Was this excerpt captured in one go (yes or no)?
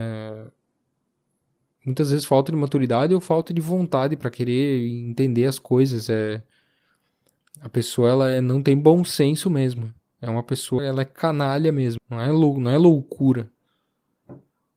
no